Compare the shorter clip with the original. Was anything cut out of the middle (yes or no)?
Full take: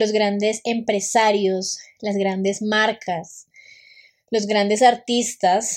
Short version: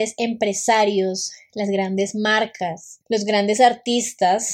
yes